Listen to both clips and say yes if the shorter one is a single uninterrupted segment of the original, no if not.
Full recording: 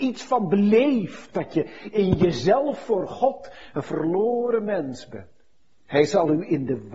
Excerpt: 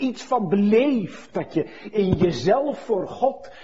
yes